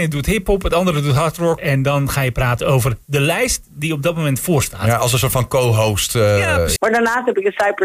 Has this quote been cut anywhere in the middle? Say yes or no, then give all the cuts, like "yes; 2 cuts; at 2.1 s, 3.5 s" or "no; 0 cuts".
yes; 2 cuts; at 1.6 s, 6.8 s